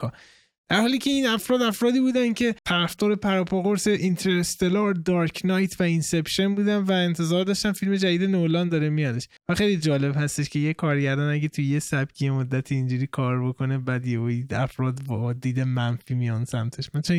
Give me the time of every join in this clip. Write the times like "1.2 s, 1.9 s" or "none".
2.6 s, 9.4 s